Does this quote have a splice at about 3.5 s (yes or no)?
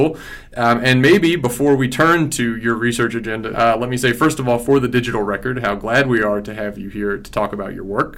yes